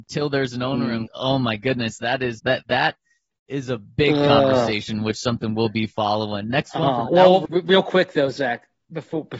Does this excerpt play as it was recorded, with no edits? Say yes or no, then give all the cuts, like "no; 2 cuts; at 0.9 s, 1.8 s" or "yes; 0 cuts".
no; 3 cuts; at 1.1 s, 2.4 s, 7.4 s